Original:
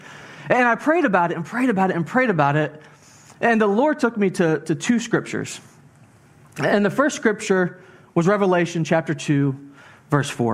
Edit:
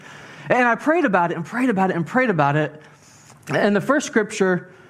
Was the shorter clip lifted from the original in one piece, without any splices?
no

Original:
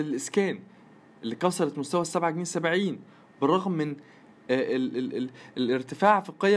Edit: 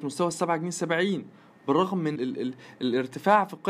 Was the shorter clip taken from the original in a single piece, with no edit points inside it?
no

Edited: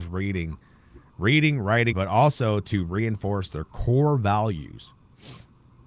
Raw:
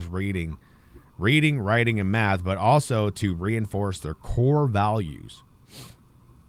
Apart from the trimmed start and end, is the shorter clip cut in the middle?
yes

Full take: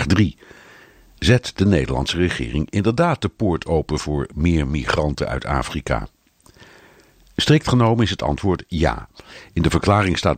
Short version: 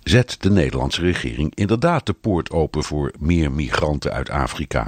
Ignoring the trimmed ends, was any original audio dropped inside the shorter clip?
no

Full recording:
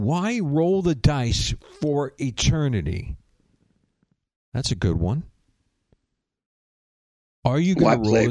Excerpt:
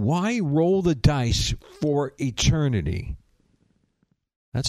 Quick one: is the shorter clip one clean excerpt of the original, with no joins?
yes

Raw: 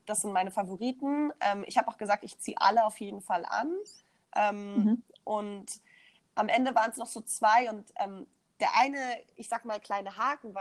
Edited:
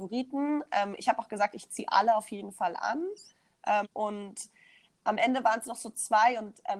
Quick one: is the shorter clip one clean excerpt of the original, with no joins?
no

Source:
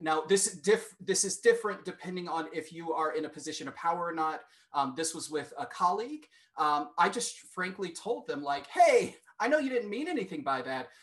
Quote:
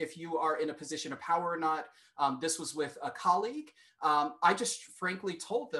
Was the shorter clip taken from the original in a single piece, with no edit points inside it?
yes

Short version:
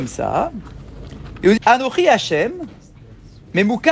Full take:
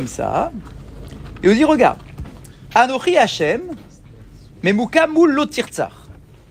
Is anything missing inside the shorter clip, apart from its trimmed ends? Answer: yes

